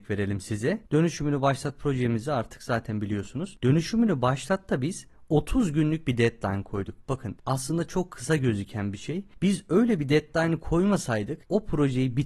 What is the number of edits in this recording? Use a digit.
0